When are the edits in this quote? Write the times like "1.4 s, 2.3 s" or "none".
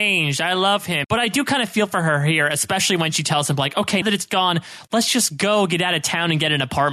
1.0 s, 4.0 s

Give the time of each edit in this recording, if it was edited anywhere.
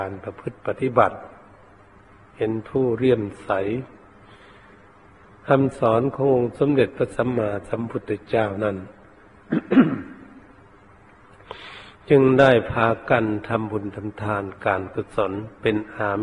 none

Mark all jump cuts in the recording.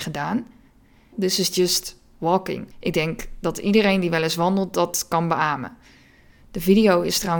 1.1 s, 2.7 s

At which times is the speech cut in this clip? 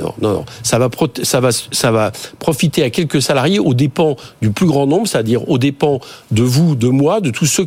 none

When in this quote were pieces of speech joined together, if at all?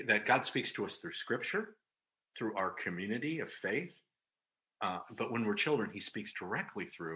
none

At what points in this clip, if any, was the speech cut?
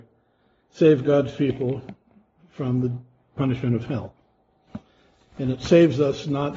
5.2 s

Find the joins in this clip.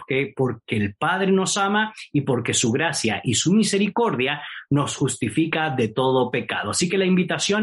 none

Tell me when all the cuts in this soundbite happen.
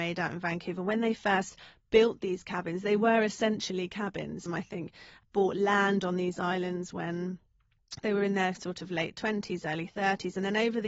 4.5 s

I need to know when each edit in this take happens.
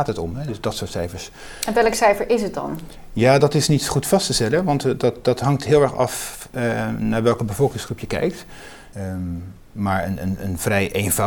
8.9 s

